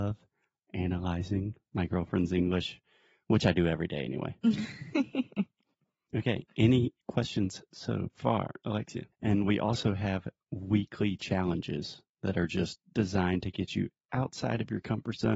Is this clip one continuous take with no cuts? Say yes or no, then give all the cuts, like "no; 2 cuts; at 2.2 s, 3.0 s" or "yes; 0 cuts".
no; 1 cut; at 9.1 s